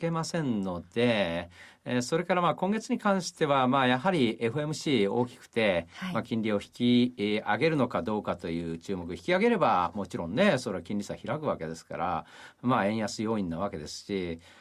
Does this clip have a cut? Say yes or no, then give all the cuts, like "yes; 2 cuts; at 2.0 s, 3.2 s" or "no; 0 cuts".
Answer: no; 0 cuts